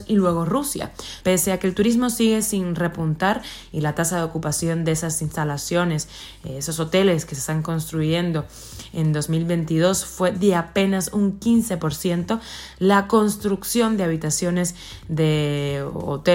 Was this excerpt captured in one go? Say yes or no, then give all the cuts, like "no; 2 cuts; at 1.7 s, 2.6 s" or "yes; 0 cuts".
no; 1 cut; at 1.2 s